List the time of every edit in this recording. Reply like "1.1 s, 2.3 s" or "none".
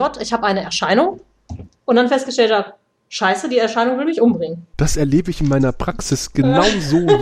none

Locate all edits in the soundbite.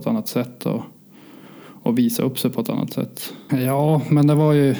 3.5 s

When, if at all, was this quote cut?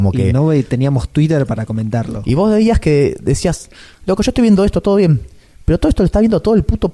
none

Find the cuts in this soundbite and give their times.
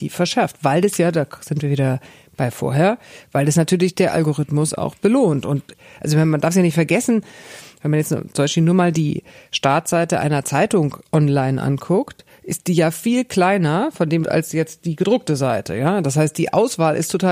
14.2 s

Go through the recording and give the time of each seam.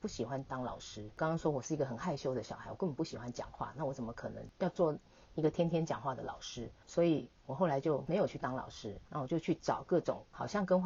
none

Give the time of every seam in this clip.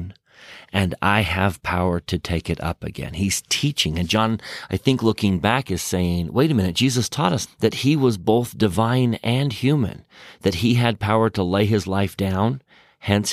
7.5 s

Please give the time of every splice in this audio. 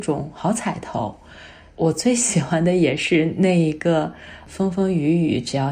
none

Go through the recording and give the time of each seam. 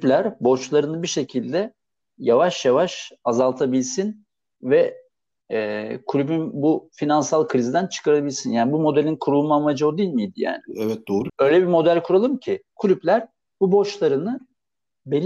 11.3 s, 12.7 s

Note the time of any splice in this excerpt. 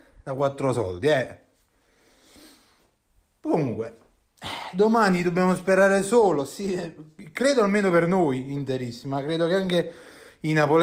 none

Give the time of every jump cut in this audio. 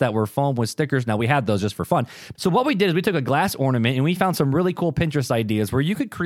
2.4 s

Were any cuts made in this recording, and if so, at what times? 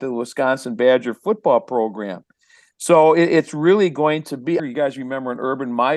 4.6 s

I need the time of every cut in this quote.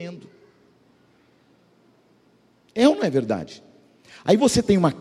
none

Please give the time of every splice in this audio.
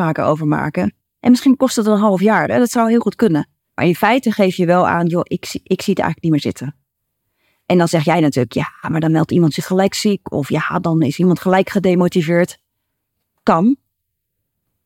3.6 s

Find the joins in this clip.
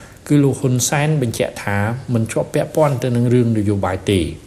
none

